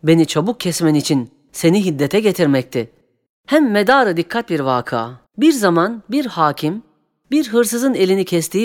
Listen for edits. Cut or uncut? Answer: cut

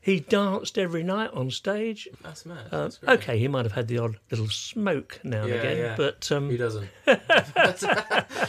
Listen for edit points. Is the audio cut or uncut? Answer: cut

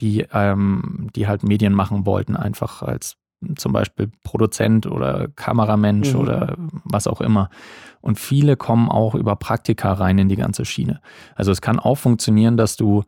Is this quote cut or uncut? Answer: uncut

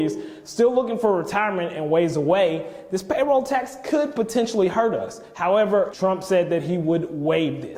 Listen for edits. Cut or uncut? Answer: cut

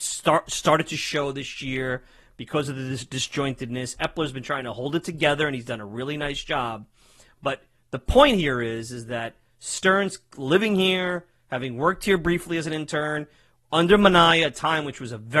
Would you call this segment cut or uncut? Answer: uncut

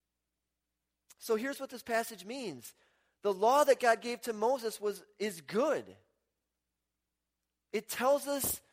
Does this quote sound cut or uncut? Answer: uncut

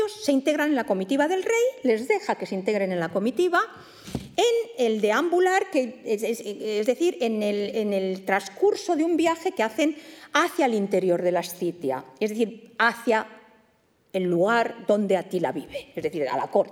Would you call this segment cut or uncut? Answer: uncut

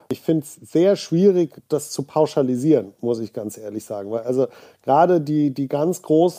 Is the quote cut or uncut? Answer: uncut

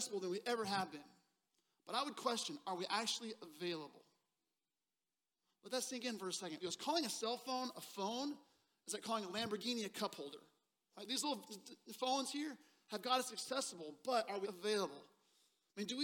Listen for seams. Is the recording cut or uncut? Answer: cut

